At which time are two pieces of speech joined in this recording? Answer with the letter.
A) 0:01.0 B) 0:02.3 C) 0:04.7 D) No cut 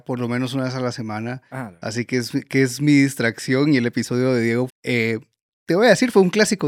C